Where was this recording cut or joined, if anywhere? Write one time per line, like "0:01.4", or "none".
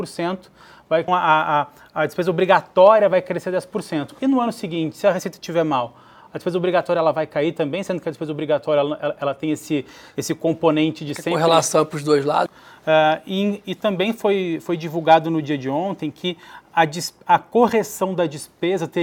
0:01.1
0:12.5

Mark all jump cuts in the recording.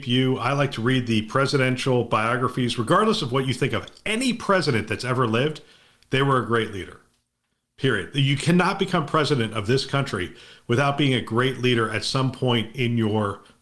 none

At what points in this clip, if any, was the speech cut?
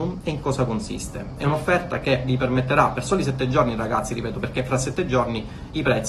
none

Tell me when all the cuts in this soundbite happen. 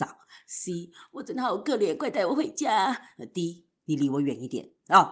0:03.7

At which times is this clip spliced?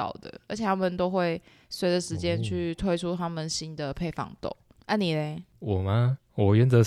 none

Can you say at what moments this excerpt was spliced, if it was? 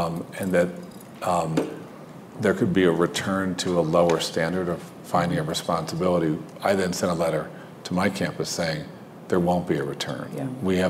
none

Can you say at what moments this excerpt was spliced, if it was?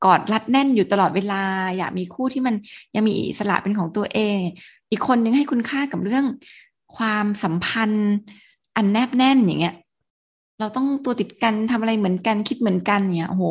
none

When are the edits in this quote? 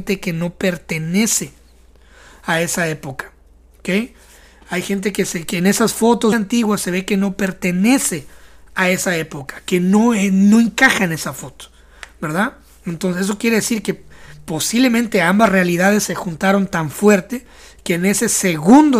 0:06.3

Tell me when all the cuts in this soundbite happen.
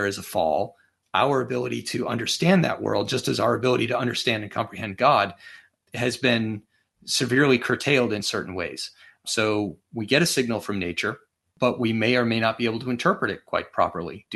none

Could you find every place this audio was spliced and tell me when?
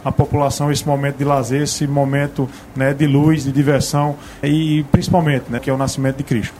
0:04.4
0:05.6

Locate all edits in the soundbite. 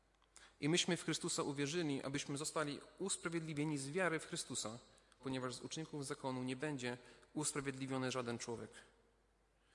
0:05.2

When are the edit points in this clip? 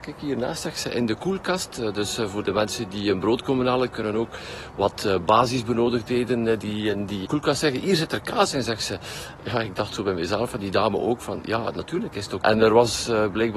0:07.2
0:09.4
0:12.4

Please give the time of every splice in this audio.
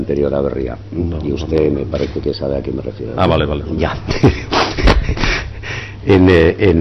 none

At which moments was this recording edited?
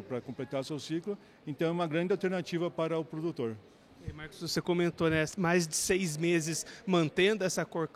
none

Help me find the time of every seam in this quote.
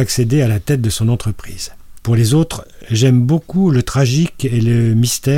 0:02.0

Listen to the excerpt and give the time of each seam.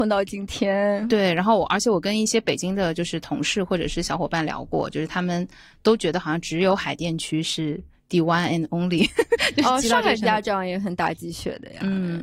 none

